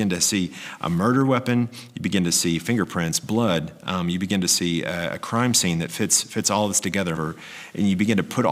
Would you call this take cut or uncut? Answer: cut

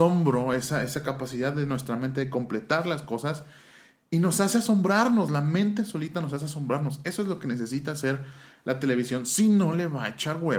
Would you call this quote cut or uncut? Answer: uncut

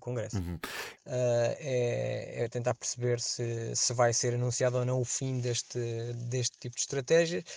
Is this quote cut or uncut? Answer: cut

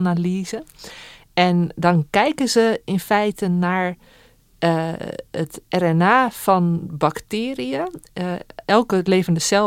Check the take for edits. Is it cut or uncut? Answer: uncut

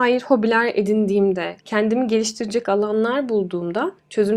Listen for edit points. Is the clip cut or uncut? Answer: cut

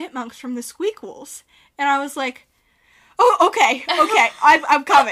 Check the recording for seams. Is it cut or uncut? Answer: uncut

